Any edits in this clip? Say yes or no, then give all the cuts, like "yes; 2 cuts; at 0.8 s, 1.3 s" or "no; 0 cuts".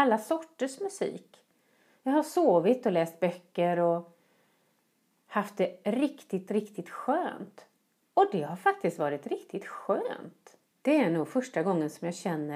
yes; 2 cuts; at 8.0 s, 10.7 s